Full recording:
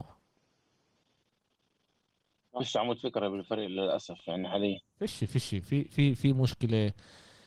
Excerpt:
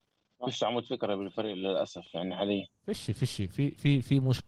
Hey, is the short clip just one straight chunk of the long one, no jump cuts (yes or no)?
yes